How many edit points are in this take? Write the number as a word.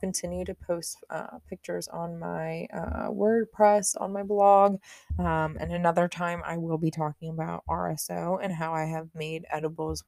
one